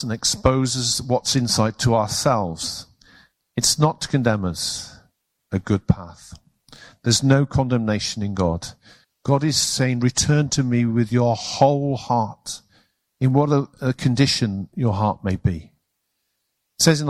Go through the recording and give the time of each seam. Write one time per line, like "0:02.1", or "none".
0:05.4
0:09.0